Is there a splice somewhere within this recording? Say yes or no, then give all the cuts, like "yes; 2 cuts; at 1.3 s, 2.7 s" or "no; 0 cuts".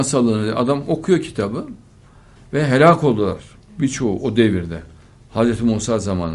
yes; 1 cut; at 2.4 s